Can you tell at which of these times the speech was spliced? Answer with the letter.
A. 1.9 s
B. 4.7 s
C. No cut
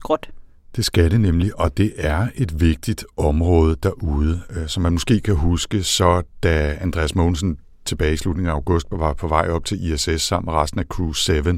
C